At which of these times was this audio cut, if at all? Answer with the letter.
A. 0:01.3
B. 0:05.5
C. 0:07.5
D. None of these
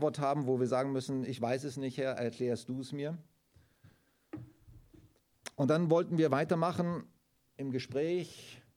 C